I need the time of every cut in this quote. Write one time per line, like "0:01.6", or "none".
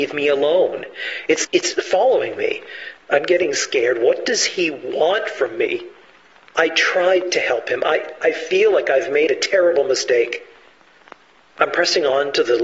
0:01.4
0:03.0